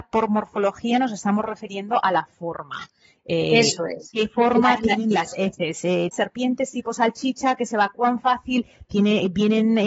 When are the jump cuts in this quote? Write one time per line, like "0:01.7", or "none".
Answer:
0:06.1
0:08.9